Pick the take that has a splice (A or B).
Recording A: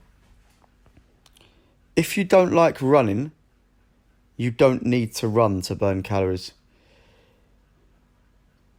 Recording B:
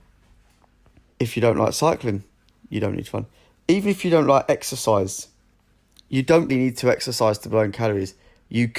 B